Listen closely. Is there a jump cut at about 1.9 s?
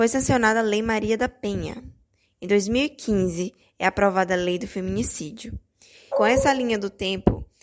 no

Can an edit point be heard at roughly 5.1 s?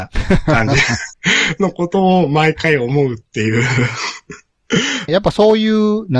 yes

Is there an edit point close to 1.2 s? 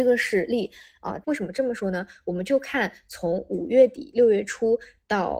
yes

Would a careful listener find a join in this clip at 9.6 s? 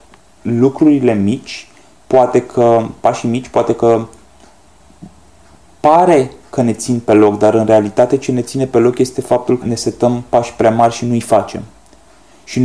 yes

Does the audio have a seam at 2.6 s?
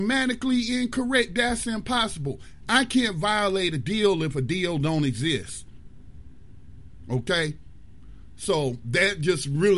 no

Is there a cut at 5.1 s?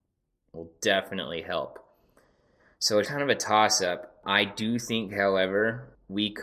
no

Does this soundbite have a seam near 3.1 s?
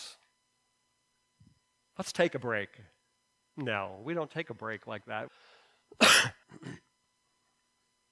no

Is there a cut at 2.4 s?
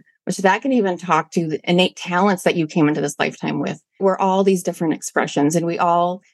no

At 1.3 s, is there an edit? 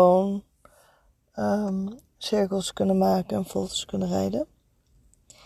no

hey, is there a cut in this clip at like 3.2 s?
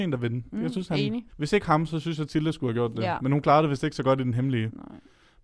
no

